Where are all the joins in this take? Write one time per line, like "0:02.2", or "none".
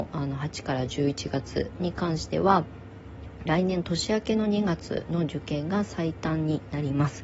0:03.5